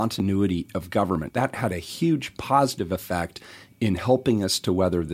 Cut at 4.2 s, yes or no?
no